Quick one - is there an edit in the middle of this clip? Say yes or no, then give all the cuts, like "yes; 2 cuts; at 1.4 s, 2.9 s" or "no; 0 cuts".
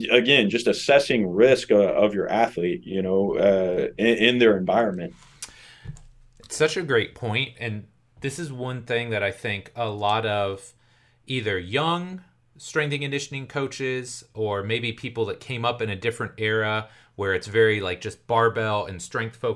no; 0 cuts